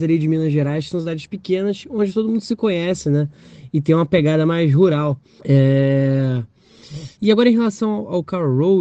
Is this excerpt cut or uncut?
cut